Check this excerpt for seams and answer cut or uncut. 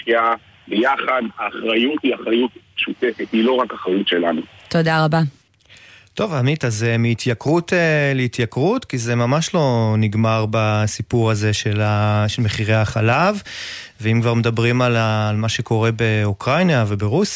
uncut